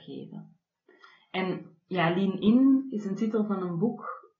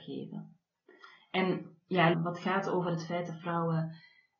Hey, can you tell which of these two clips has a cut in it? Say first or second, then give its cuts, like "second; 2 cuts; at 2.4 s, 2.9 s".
second; 1 cut; at 2.1 s